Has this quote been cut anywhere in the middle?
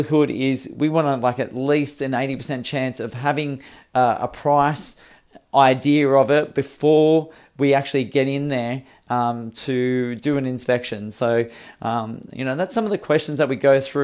no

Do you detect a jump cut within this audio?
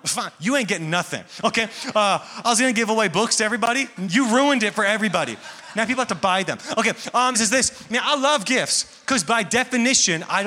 yes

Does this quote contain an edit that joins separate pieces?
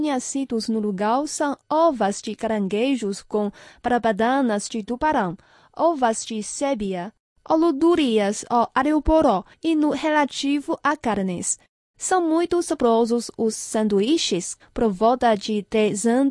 yes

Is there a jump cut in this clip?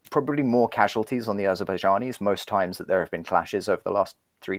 no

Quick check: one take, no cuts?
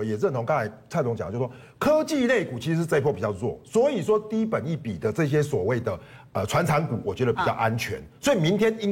yes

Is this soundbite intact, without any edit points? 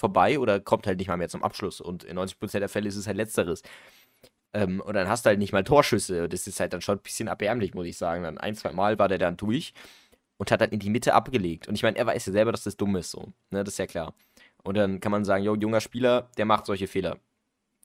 yes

